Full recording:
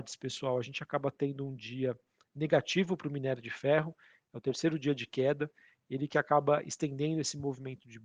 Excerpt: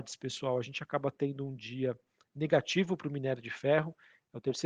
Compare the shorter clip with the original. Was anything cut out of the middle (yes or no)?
no